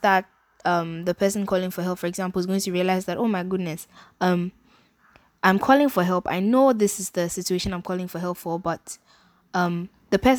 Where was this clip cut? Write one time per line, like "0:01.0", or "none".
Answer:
none